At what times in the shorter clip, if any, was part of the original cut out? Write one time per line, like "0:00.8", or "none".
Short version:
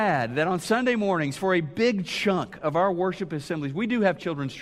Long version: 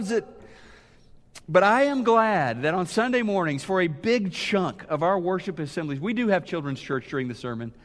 none